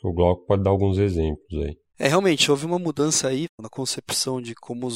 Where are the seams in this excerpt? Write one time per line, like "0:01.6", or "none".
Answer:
none